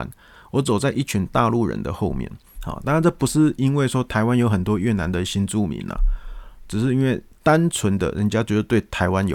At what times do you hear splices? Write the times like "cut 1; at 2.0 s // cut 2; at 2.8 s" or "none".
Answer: cut 1; at 2.6 s